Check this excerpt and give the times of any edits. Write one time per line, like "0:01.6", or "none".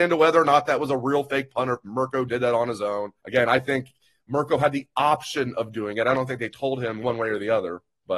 0:03.2

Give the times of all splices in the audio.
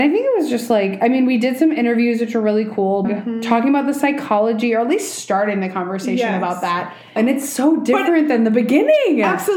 0:03.0
0:07.2

